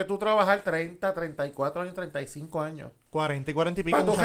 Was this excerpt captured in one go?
yes; 0 cuts

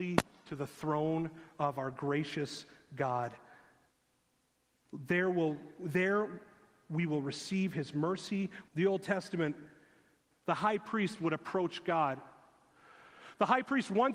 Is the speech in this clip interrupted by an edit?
yes; 1 cut; at 8.7 s

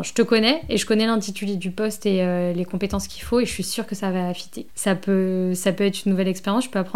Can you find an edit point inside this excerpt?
yes; 1 cut; at 4.7 s

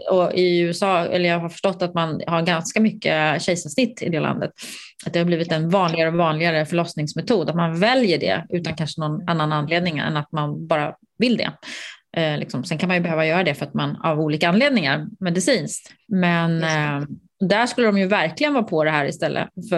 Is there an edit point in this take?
no; 0 cuts

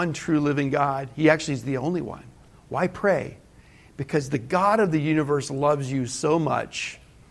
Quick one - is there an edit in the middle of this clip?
no; 0 cuts

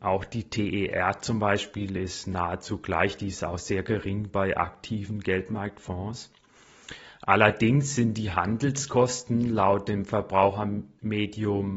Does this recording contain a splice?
no; 0 cuts

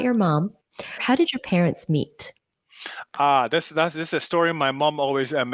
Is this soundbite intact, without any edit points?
yes; 0 cuts

